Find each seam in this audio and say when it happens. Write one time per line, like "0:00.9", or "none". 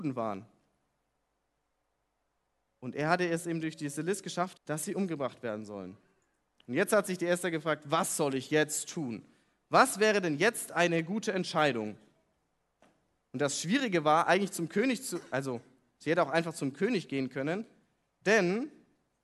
0:04.5